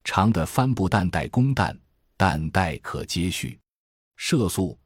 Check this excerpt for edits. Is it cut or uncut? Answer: uncut